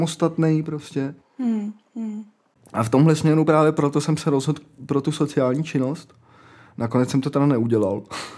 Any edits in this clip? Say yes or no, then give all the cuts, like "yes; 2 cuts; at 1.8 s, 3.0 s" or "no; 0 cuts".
no; 0 cuts